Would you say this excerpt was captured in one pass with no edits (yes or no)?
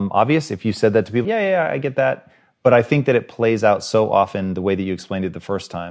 no